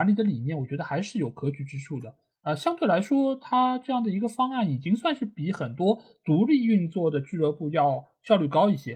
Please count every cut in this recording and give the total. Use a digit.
0